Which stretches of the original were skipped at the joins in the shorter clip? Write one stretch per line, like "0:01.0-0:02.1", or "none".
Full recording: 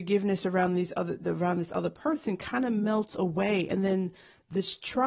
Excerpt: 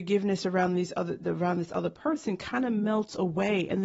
none